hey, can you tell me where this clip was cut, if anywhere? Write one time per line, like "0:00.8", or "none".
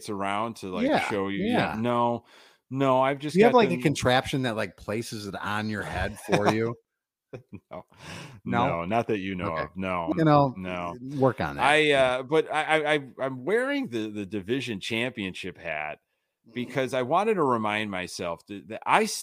0:10.1